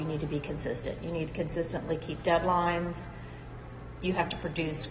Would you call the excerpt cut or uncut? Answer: uncut